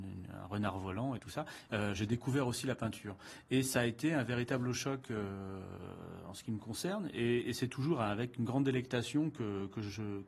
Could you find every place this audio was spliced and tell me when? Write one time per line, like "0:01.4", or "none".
0:01.7